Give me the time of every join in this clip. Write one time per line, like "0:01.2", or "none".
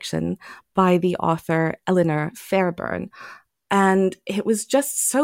0:03.5